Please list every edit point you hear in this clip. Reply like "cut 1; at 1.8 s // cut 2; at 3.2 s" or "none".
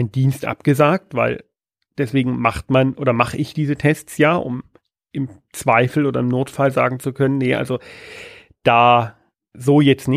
none